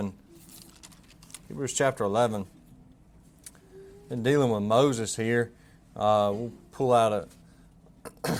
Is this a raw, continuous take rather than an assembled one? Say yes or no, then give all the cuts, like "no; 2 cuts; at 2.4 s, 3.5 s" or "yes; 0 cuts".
yes; 0 cuts